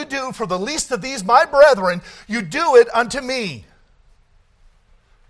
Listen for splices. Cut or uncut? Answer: uncut